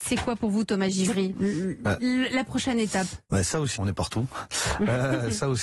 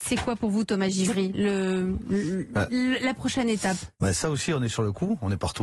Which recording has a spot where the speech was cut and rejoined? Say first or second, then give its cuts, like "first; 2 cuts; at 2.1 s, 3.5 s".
first; 2 cuts; at 1.3 s, 3.8 s